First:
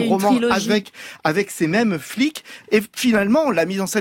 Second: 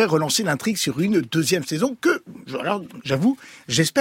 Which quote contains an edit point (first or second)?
first